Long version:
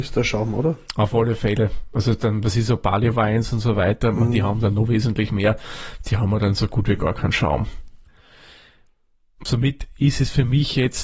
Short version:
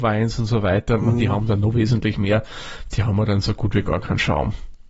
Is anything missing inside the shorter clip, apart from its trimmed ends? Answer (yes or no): no